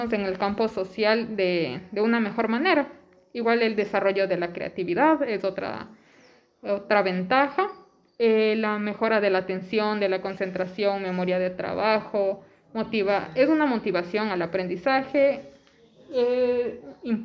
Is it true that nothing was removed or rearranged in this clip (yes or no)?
yes